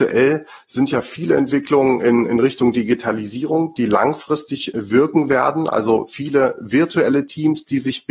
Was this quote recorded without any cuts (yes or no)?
yes